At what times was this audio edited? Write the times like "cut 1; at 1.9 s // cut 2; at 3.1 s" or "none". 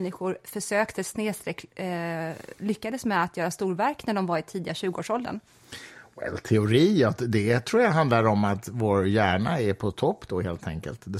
none